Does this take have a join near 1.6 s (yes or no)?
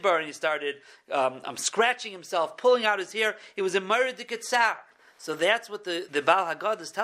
no